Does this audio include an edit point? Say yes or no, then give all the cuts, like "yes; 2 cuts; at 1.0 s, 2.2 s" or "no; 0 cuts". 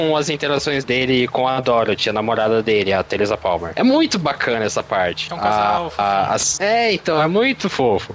no; 0 cuts